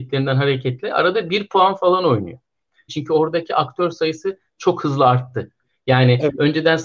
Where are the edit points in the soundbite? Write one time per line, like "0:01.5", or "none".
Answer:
0:02.9